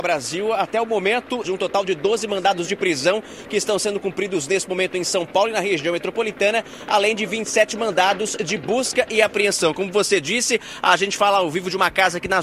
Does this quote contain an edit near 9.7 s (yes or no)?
no